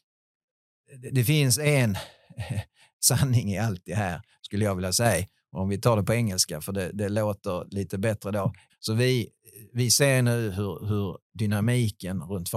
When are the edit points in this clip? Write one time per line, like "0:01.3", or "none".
0:08.7
0:10.8